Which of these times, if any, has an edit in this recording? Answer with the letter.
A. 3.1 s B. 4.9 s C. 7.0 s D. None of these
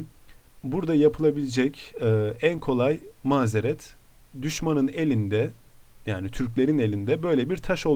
A